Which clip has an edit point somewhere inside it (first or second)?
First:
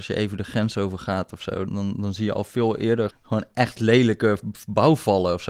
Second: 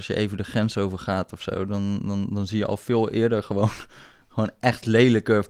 first